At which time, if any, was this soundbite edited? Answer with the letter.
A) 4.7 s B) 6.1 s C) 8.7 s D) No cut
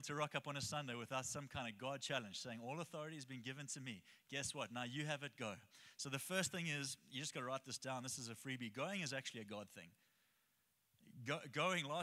D